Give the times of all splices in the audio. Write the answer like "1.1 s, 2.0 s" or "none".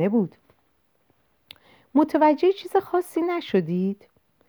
none